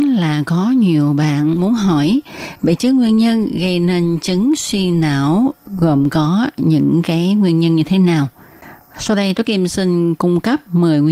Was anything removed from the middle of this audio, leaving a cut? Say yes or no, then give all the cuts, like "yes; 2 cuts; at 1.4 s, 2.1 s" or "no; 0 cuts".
no; 0 cuts